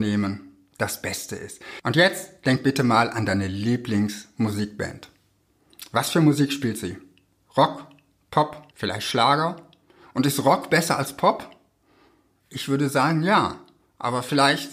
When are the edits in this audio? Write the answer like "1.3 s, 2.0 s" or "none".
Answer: 8.7 s